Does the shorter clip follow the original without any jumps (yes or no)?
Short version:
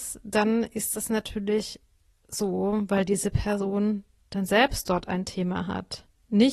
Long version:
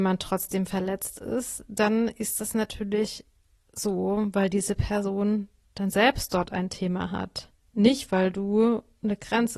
yes